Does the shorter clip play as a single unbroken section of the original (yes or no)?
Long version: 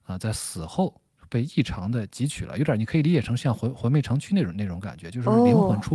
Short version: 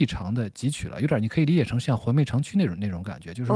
no